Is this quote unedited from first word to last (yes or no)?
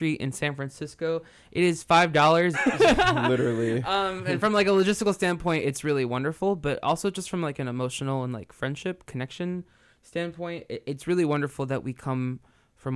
no